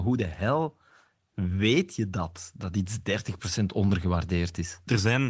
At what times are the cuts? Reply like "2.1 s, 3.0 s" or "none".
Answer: none

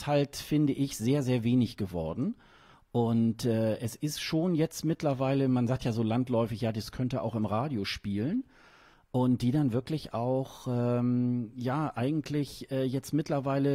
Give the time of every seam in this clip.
none

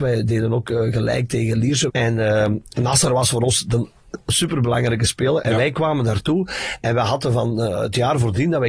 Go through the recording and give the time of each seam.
1.9 s, 5.4 s

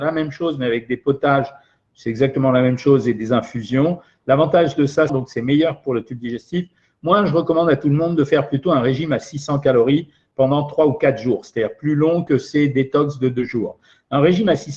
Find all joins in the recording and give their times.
5.1 s

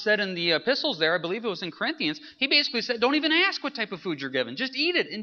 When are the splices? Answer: none

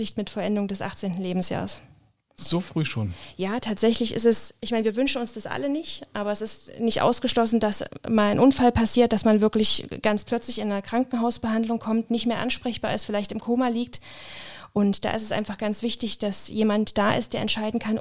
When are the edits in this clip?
none

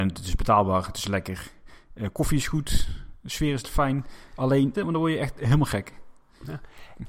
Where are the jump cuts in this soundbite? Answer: 4.7 s

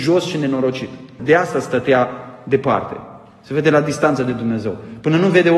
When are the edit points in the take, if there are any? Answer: 1.2 s

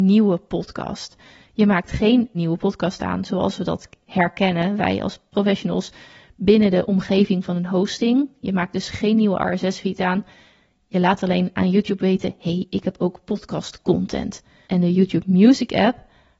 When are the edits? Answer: 2.3 s, 14.6 s

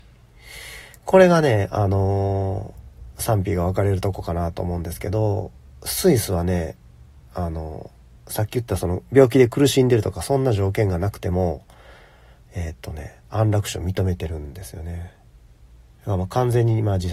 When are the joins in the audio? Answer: none

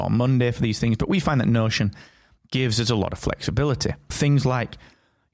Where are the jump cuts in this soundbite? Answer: 4.1 s

